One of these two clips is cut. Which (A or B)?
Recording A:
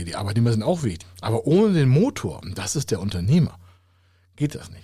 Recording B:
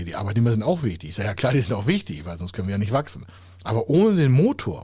A